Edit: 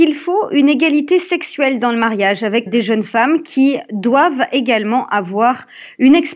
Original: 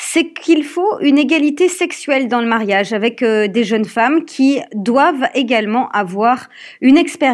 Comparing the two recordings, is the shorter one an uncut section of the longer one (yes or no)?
no